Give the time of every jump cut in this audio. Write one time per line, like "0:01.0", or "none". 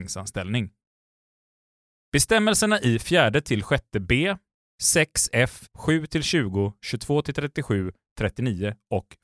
0:05.7